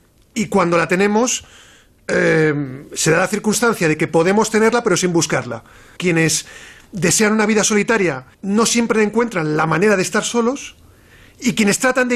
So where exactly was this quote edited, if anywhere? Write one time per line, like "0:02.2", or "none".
0:06.0
0:08.3